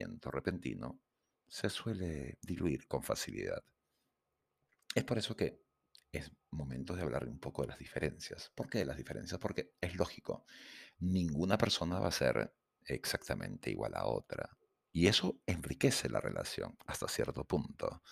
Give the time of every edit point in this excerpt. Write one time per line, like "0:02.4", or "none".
none